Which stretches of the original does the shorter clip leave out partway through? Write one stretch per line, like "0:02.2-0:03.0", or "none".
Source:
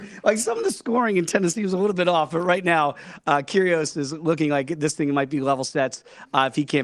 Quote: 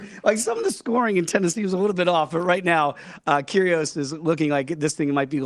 none